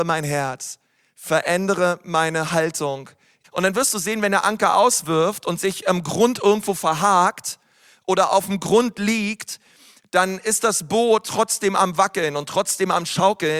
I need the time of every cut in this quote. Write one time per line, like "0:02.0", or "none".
0:03.4